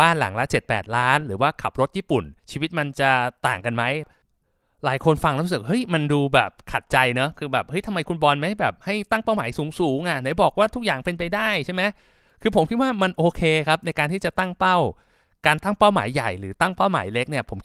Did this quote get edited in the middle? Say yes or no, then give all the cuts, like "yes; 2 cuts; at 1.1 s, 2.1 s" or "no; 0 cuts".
yes; 1 cut; at 2.4 s